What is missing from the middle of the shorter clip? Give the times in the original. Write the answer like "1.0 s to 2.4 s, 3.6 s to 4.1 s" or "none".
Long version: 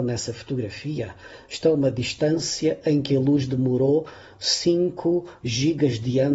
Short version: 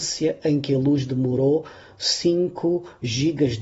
none

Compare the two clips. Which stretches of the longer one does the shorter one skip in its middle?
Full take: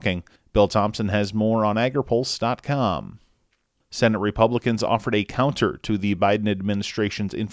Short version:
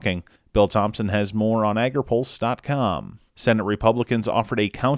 3.3 s to 3.8 s

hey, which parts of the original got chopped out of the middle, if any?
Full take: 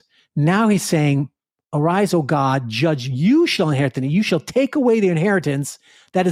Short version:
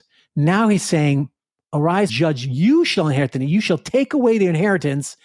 2.1 s to 2.7 s

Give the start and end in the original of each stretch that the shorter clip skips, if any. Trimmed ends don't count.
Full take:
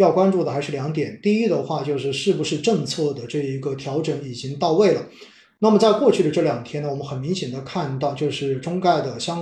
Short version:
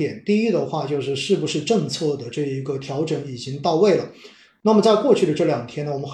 none

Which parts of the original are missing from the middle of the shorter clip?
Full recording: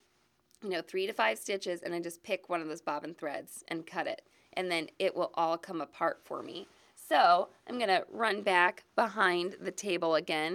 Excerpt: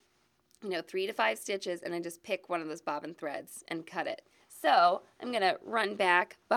4.4 s to 6.9 s

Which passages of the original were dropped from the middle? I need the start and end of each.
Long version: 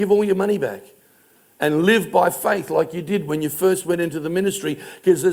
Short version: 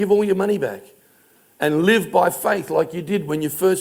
none

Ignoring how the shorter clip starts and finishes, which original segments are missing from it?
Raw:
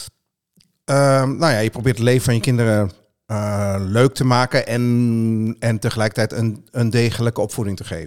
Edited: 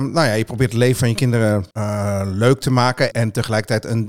3.0 s to 3.2 s, 4.7 s to 5.6 s

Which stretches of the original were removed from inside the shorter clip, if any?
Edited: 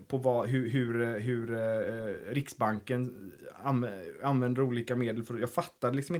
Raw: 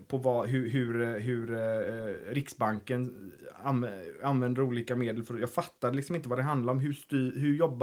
none

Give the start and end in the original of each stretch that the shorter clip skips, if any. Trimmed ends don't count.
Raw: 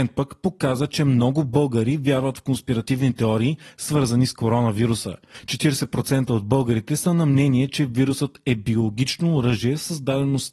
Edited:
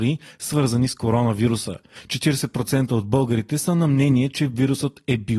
none

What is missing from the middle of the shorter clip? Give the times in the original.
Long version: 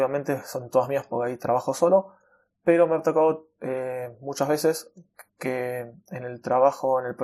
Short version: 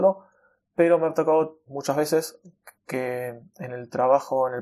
3.5 s to 4.2 s

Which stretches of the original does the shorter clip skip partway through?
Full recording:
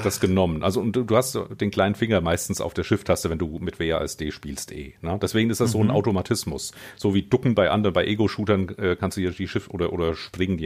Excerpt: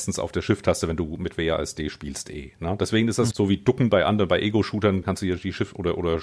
5.7 s to 7.0 s, 8.7 s to 9.0 s

